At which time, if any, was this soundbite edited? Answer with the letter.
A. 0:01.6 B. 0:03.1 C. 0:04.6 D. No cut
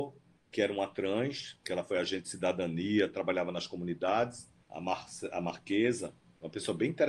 C